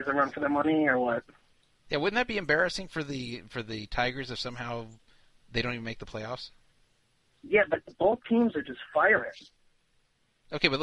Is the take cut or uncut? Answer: uncut